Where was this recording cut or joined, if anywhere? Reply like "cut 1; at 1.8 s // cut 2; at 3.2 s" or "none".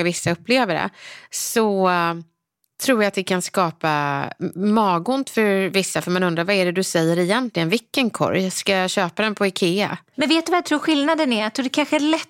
cut 1; at 10.1 s